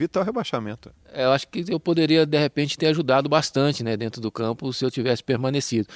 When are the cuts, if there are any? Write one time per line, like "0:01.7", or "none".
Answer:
none